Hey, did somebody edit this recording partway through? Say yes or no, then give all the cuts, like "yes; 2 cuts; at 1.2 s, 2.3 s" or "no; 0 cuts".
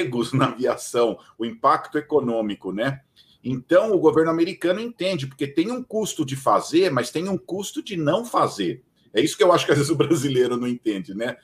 no; 0 cuts